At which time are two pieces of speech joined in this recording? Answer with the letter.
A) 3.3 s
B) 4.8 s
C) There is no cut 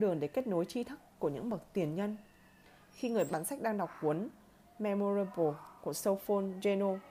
A